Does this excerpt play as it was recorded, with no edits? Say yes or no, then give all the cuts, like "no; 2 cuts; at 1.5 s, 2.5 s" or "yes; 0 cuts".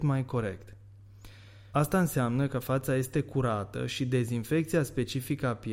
no; 1 cut; at 1.7 s